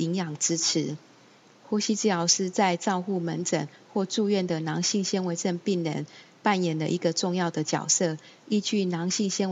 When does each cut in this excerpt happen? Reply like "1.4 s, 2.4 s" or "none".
none